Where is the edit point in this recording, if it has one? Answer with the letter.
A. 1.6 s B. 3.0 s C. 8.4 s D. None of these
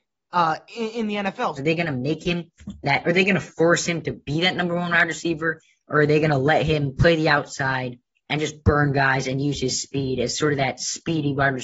A